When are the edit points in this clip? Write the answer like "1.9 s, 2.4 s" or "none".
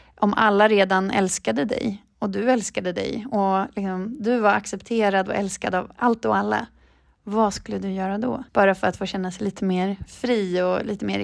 8.5 s